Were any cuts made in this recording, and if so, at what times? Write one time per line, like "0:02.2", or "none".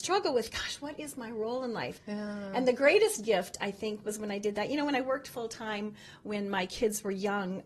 0:02.0